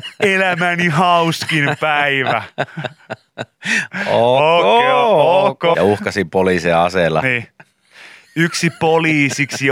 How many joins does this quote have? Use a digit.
1